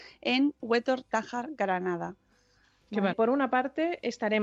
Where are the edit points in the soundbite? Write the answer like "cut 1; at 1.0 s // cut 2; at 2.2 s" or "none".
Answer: cut 1; at 3.1 s